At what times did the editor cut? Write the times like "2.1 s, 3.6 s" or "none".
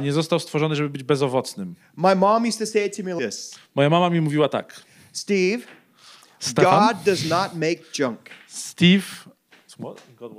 3.2 s

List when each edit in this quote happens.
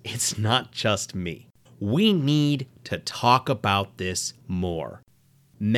1.7 s, 4.4 s

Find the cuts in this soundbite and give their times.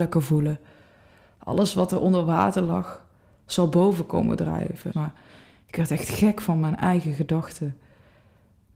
4.9 s

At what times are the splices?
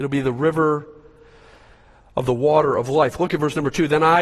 none

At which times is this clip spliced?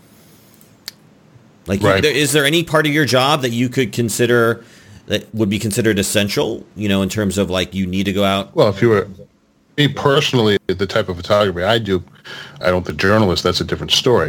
12.6 s

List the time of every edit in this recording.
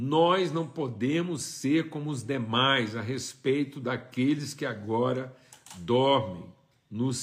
none

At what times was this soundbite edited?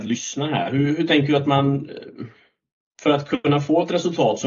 none

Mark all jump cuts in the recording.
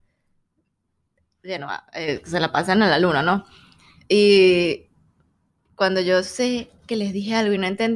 none

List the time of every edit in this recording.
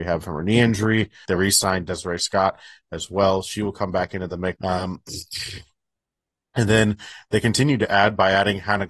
1.3 s, 4.6 s

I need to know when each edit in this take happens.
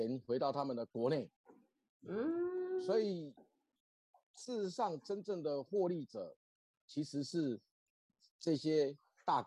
none

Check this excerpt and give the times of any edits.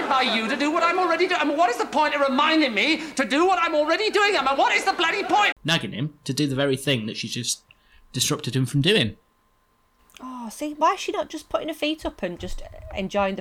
5.5 s, 10.7 s, 12.4 s

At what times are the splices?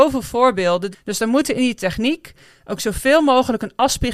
0.9 s

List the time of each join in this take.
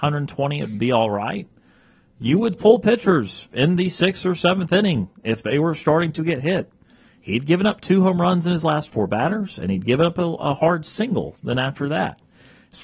2.5 s

